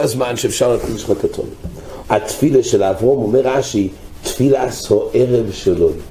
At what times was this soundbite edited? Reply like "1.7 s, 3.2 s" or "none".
2.0 s